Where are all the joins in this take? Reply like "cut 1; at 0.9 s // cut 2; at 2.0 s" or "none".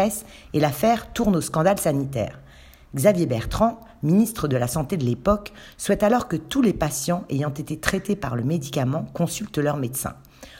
none